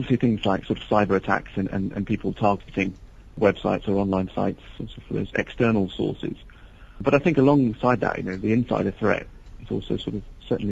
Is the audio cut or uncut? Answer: uncut